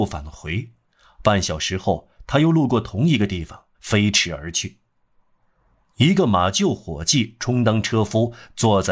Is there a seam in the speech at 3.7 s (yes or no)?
yes